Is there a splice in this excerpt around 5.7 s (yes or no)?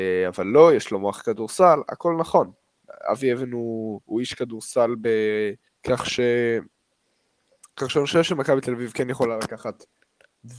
yes